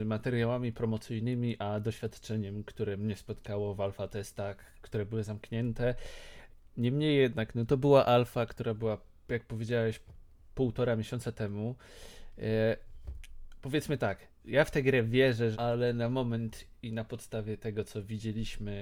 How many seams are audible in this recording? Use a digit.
3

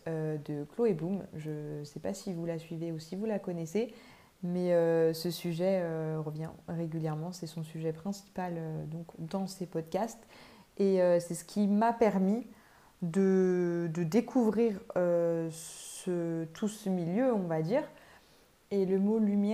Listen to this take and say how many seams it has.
1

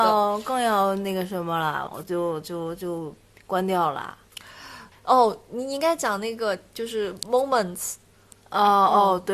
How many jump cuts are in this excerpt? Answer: 2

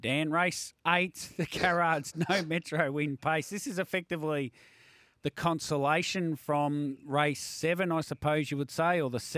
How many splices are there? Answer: 0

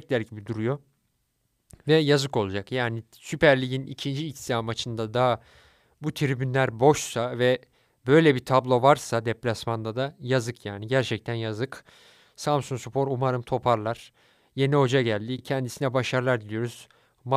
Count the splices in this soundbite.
0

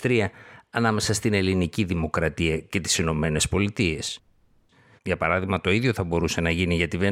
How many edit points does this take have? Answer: 1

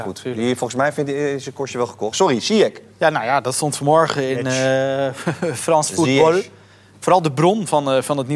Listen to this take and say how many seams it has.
1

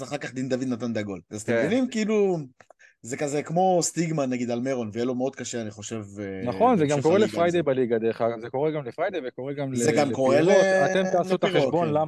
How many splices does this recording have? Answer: 0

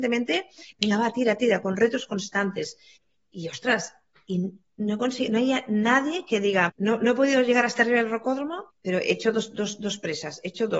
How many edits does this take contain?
2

